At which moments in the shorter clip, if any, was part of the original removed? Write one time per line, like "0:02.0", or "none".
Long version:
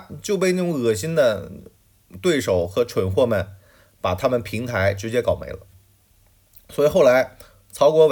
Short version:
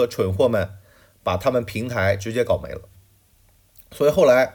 none